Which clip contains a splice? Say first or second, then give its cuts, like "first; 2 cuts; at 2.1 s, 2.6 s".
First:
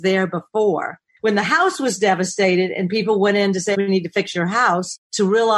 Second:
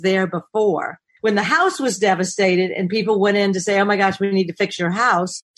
first; 1 cut; at 3.7 s